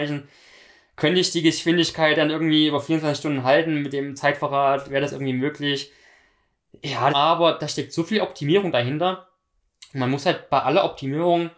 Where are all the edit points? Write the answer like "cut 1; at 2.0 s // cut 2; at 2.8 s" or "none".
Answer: cut 1; at 7.1 s